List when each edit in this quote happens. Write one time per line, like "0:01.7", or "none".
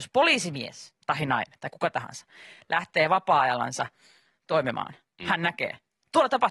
0:01.0

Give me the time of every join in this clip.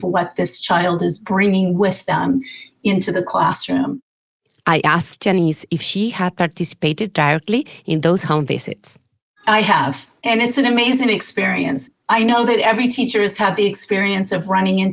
none

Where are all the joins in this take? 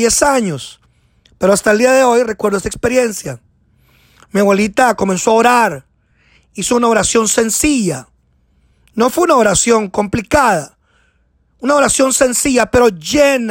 none

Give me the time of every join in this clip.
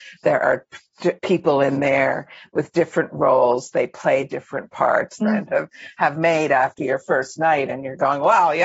0:01.2
0:05.2

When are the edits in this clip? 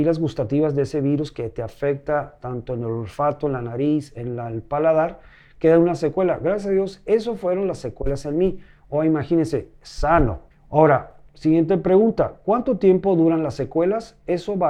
0:10.5

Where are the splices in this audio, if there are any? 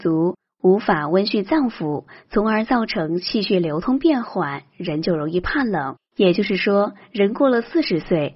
0:06.0

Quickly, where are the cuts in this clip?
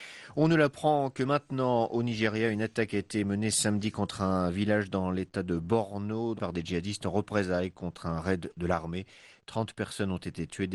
0:06.4

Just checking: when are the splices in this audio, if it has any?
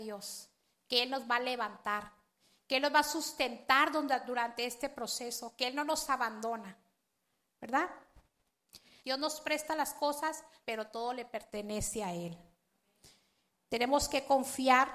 0:09.0
0:10.6

